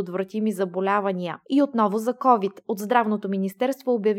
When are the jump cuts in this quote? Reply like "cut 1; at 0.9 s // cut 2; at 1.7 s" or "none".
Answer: cut 1; at 1.4 s